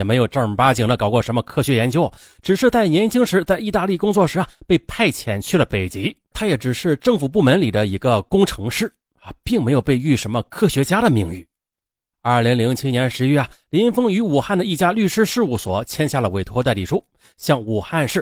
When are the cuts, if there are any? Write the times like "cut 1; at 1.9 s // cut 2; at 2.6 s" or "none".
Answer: cut 1; at 6.3 s // cut 2; at 12.1 s